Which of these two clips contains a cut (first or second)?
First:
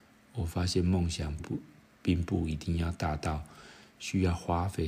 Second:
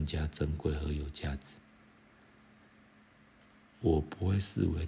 first